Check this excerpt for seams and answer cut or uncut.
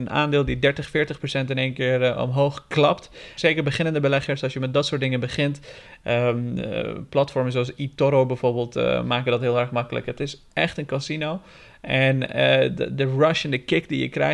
cut